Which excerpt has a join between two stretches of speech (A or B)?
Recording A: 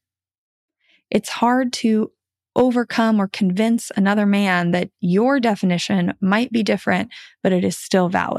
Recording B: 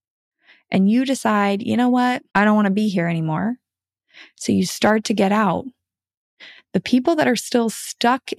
B